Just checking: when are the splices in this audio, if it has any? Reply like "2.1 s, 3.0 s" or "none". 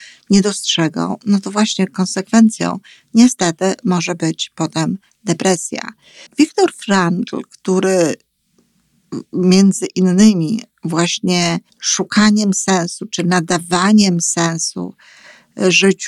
6.3 s, 11.7 s